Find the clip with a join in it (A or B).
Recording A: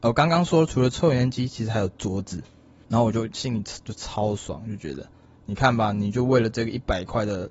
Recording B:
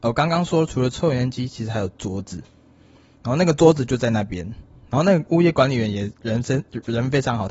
A